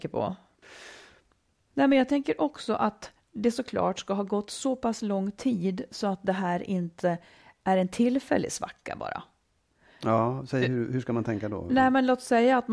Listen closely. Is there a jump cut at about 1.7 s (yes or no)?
yes